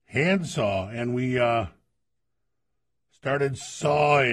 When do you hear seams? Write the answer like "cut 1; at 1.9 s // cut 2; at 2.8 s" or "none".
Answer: none